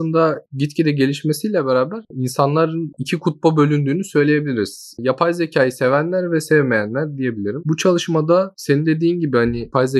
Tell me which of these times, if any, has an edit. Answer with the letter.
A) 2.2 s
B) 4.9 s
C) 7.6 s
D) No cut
C